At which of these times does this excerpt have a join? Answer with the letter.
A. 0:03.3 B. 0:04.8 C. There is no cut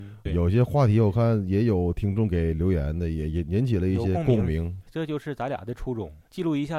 C